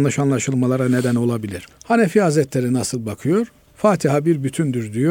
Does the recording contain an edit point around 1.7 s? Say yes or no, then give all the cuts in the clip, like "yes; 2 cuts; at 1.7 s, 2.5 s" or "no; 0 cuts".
yes; 1 cut; at 1.7 s